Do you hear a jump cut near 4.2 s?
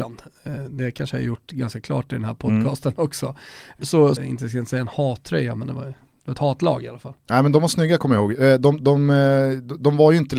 yes; 1 cut; at 4.2 s

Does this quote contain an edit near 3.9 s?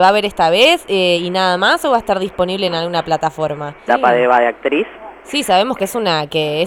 yes; 1 cut; at 3.9 s

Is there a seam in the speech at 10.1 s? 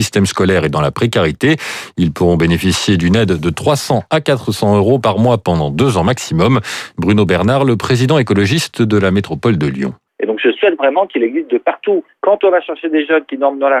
yes; 1 cut; at 10.1 s

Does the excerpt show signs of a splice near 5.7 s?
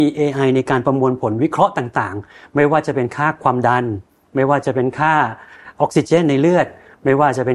yes; 1 cut; at 5.7 s

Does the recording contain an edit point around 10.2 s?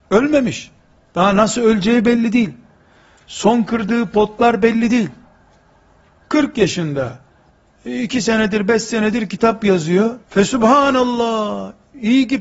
yes; 1 cut; at 10.2 s

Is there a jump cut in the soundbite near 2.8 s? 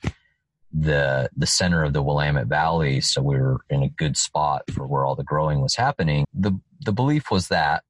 no; 1 cut; at 6.2 s

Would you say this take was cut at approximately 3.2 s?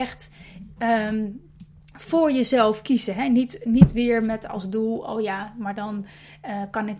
no; 0 cuts

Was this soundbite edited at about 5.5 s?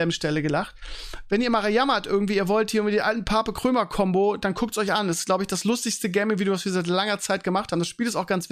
no; 0 cuts

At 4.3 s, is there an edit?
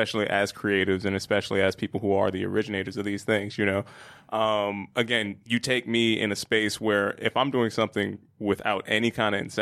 no; 0 cuts

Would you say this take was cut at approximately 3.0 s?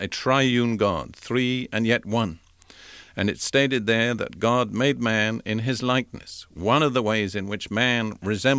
no; 0 cuts

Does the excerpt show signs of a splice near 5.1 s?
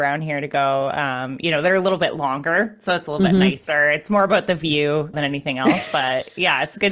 yes; 1 cut; at 5.1 s

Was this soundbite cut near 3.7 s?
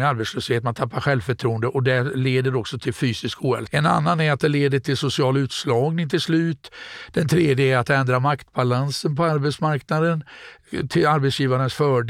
yes; 1 cut; at 3.7 s

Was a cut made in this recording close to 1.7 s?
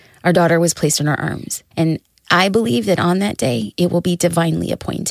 yes; 1 cut; at 1.7 s

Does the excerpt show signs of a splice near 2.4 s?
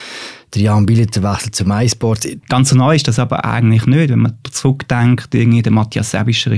yes; 1 cut; at 2.4 s

